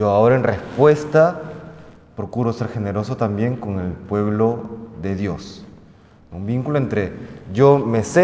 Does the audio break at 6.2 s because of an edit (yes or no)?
no